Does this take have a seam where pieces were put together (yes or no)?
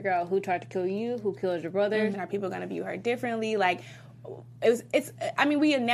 yes